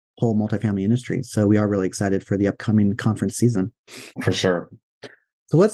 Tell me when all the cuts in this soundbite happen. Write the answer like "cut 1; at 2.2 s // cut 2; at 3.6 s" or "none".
cut 1; at 4.1 s